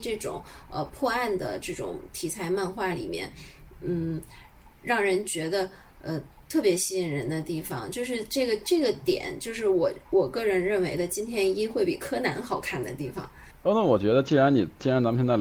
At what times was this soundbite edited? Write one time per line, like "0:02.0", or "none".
0:13.5